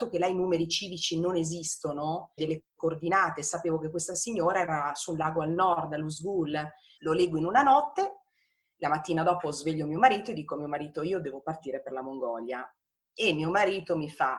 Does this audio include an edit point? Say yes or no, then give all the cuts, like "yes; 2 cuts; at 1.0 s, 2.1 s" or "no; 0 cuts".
yes; 2 cuts; at 2.4 s, 7.0 s